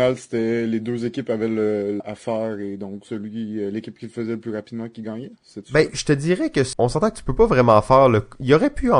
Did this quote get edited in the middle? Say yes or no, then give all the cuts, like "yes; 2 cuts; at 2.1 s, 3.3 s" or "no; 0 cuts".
yes; 2 cuts; at 2.0 s, 6.7 s